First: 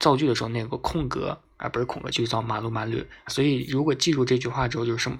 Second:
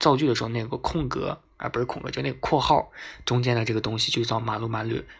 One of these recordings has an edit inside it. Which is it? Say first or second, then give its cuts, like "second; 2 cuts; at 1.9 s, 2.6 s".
first; 2 cuts; at 2.1 s, 3.3 s